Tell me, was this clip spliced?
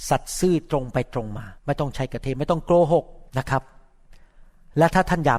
yes; 2 cuts; at 1.6 s, 3.3 s

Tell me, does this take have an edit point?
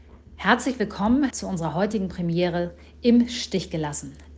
yes; 1 cut; at 1.3 s

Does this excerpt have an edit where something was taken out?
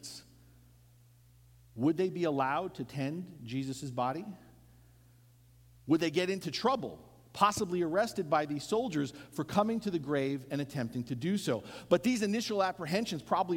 no; 0 cuts

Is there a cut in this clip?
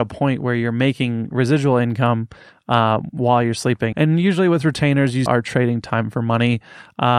yes; 2 cuts; at 3.9 s, 5.3 s

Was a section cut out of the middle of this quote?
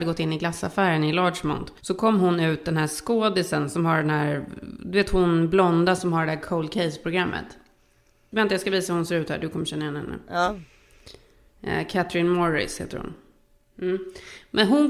yes; 1 cut; at 1.8 s

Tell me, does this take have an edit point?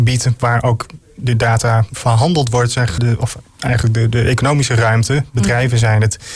yes; 1 cut; at 3.0 s

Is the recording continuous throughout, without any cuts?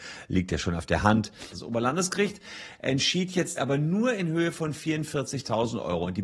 no; 2 cuts; at 1.5 s, 3.6 s

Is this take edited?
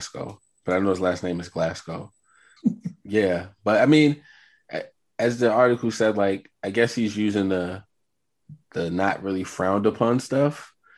yes; 2 cuts; at 2.6 s, 6.5 s

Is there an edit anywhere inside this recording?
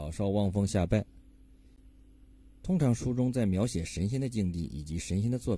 no; 0 cuts

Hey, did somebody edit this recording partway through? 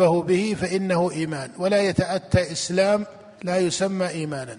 yes; 1 cut; at 3.3 s

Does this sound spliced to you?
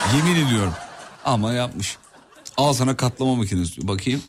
no; 0 cuts

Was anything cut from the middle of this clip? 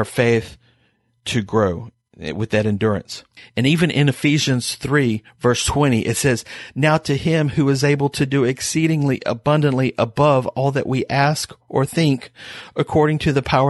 no; 0 cuts

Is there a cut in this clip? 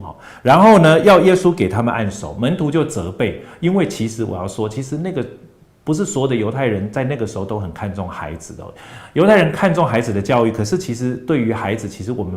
no; 0 cuts

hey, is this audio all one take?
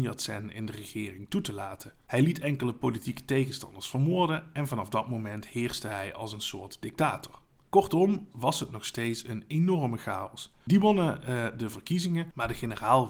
no; 2 cuts; at 8.3 s, 10.6 s

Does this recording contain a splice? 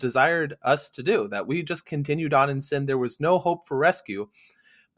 no; 0 cuts

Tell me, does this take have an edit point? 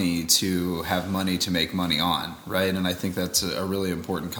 no; 0 cuts

